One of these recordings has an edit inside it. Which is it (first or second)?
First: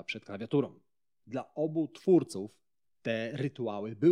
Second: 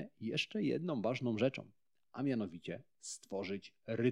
first